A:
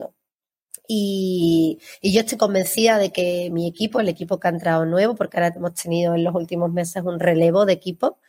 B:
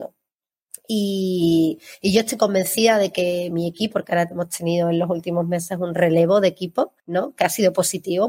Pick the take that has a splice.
B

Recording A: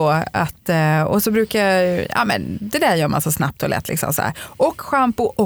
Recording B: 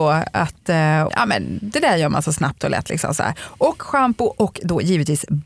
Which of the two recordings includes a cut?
B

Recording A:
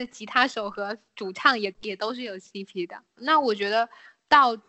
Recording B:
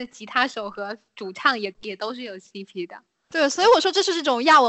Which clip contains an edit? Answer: A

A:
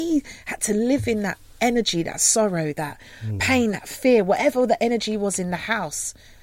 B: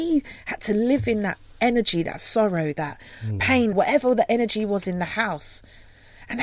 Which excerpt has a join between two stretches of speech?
B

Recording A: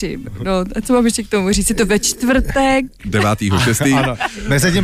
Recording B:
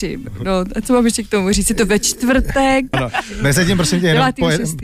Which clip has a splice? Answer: B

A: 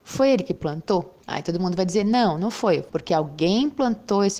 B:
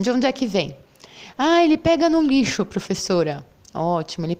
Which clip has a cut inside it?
A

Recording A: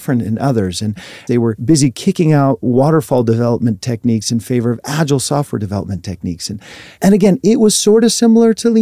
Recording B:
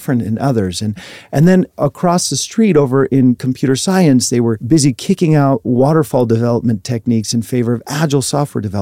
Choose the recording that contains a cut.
A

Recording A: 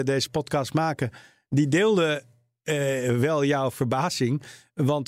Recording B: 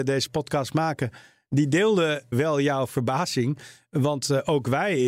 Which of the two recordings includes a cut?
B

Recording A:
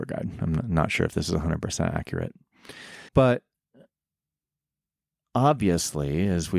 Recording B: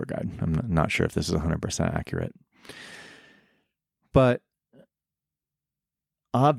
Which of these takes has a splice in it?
A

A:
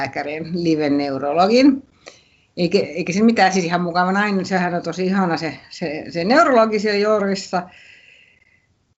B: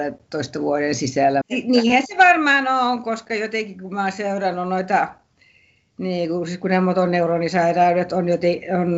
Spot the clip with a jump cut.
B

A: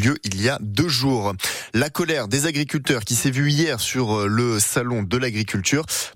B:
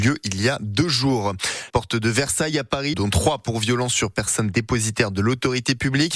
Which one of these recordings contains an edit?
B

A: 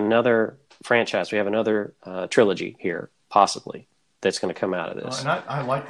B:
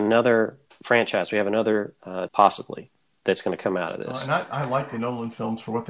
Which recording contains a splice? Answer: B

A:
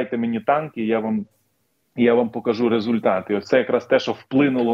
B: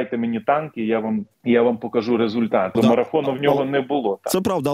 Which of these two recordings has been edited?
B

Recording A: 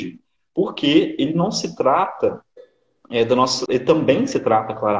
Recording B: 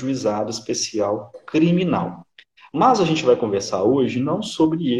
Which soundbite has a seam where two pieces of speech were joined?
A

